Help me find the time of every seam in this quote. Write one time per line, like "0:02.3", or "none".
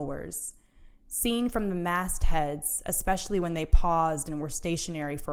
none